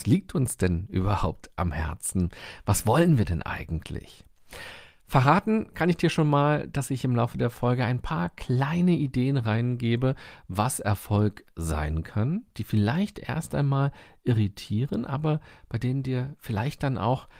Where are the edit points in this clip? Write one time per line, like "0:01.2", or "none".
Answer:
none